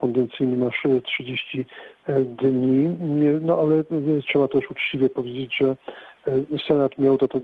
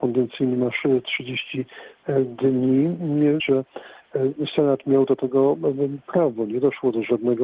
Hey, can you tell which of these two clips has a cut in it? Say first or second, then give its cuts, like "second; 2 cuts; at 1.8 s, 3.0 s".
second; 1 cut; at 3.4 s